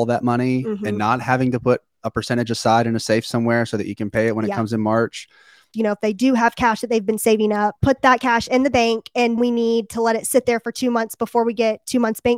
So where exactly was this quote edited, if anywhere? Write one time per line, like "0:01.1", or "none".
0:05.7
0:09.4